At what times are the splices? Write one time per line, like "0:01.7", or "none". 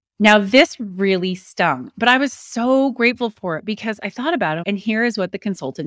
0:04.6